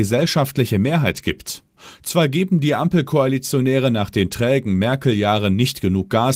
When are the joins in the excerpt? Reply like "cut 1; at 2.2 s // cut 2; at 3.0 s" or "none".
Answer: none